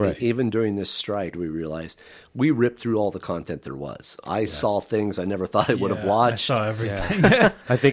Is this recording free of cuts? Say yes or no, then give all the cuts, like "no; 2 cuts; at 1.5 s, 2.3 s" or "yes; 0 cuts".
no; 1 cut; at 1.3 s